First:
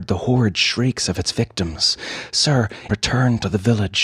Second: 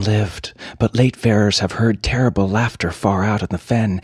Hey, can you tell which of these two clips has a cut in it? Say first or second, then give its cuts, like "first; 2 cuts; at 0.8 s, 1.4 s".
first; 1 cut; at 2.9 s